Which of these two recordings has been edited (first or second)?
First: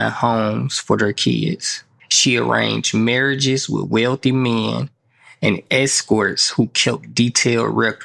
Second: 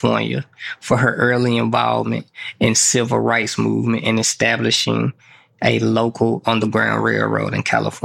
first